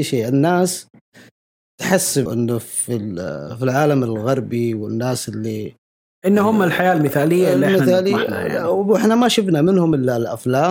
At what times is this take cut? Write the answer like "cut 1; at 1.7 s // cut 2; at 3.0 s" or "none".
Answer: cut 1; at 2.3 s